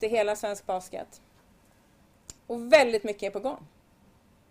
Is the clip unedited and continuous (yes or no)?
no